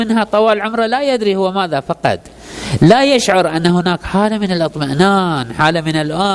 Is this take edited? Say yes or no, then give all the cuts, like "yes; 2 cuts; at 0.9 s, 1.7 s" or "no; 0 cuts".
no; 0 cuts